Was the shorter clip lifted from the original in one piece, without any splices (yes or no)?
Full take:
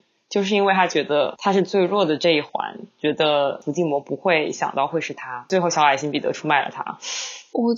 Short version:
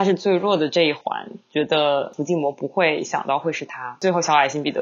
yes